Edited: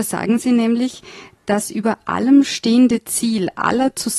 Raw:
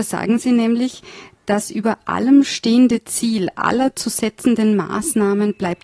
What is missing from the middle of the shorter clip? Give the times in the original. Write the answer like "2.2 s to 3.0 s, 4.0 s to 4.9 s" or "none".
none